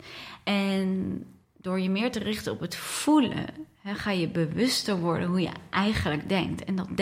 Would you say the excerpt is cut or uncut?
uncut